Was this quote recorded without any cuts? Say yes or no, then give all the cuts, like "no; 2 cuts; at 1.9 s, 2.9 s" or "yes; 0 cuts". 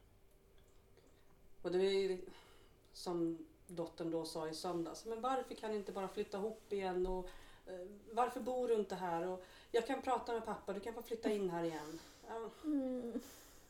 yes; 0 cuts